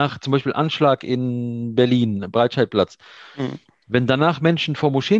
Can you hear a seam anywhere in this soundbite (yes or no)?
no